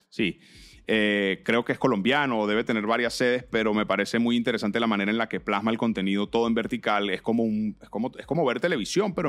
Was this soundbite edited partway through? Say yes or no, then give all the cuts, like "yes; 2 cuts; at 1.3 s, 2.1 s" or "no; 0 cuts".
no; 0 cuts